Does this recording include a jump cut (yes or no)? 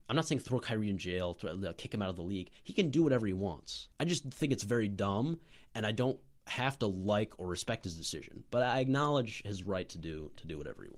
yes